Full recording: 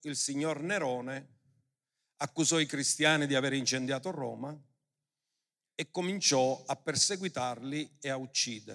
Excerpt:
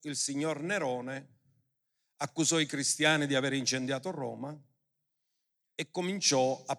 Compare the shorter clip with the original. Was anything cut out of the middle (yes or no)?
no